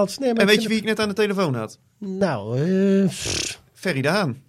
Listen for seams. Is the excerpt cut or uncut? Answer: uncut